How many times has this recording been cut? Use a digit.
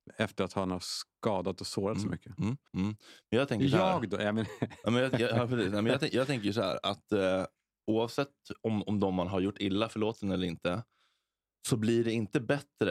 1